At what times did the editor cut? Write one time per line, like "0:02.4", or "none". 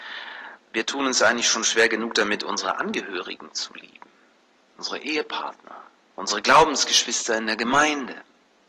0:06.1